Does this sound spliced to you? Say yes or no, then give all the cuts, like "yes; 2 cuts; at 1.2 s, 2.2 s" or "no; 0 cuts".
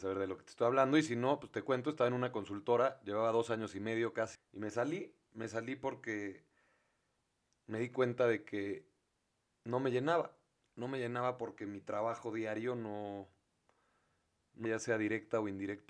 yes; 2 cuts; at 4.4 s, 14.7 s